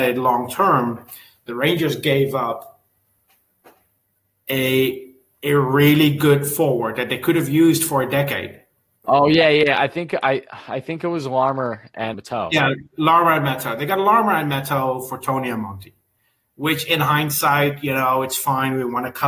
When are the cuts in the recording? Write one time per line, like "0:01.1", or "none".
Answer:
0:09.0
0:12.1